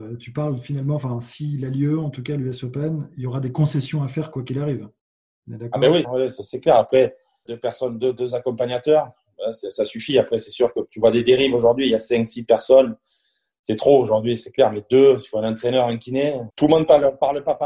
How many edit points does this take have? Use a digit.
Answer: 3